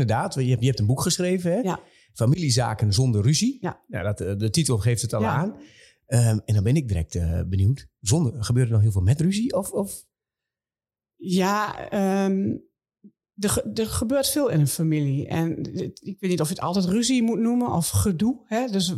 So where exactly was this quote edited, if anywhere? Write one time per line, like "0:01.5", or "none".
none

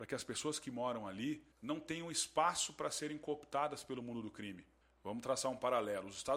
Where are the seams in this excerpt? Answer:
0:01.5
0:04.8

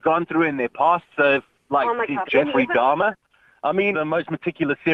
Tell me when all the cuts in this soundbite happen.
0:02.3
0:03.9

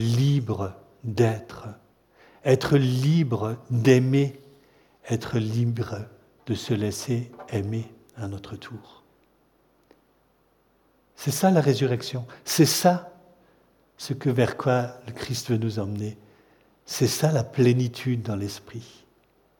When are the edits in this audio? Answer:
none

